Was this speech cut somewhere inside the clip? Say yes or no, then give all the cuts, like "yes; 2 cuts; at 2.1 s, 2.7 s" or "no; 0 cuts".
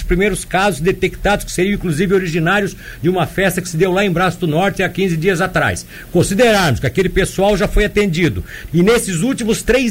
yes; 1 cut; at 8.7 s